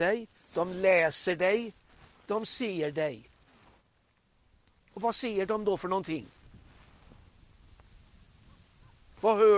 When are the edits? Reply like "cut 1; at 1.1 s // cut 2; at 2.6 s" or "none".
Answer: none